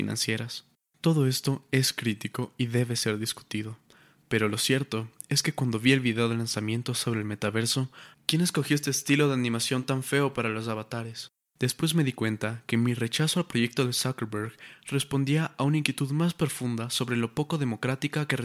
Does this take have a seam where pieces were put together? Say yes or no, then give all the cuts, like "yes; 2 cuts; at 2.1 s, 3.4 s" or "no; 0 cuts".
yes; 2 cuts; at 8.1 s, 11.5 s